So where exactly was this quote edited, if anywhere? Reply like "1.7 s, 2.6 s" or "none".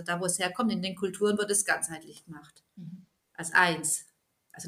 none

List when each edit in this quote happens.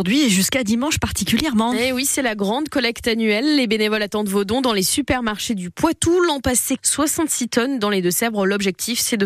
6.8 s

